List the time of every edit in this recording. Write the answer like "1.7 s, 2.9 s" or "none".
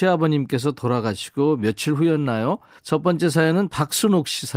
2.8 s